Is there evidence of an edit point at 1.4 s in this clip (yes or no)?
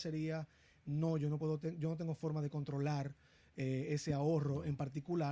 no